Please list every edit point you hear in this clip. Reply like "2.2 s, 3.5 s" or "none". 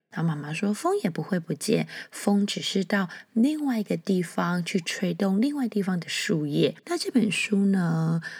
6.8 s